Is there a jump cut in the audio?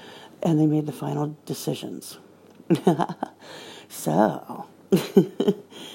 no; 0 cuts

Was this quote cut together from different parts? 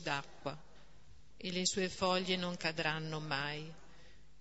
yes; 1 cut; at 1.3 s

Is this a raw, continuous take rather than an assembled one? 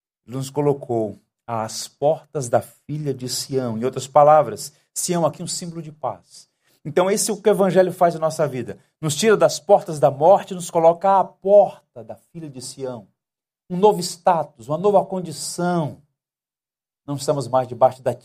yes; 0 cuts

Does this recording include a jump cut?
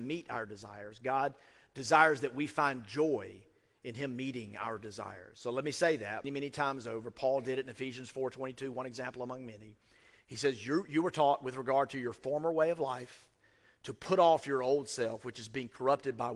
yes; 1 cut; at 6.2 s

